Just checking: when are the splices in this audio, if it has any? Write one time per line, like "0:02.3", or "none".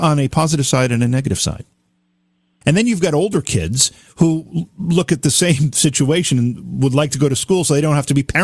0:02.6